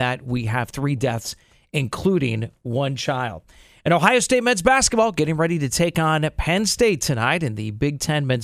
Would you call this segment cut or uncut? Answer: uncut